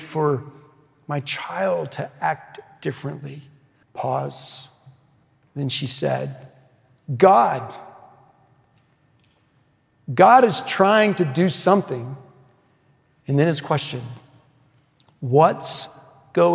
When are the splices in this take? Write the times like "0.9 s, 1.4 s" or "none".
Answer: 3.8 s, 13.2 s